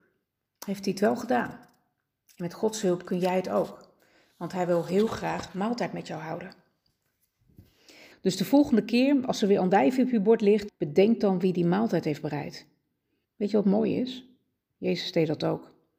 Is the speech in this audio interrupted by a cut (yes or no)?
yes